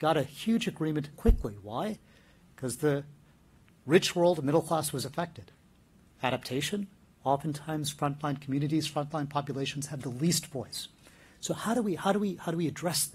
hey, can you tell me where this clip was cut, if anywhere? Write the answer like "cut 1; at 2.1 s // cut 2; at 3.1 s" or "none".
cut 1; at 1.1 s

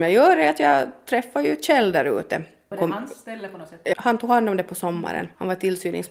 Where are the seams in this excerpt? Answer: cut 1; at 3.9 s

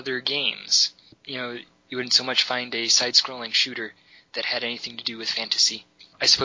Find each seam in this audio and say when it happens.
none

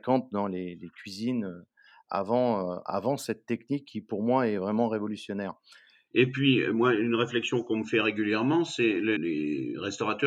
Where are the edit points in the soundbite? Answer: cut 1; at 6.1 s // cut 2; at 9.2 s

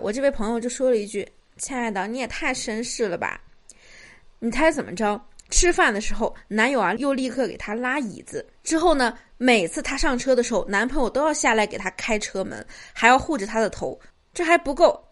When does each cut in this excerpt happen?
cut 1; at 5.4 s // cut 2; at 14.1 s

